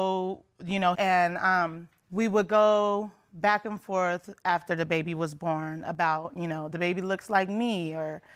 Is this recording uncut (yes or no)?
no